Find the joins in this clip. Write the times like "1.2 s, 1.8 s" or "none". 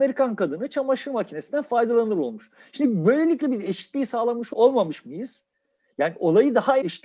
none